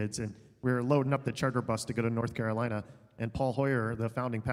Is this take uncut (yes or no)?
yes